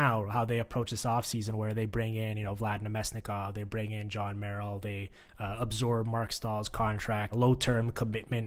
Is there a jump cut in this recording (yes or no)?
yes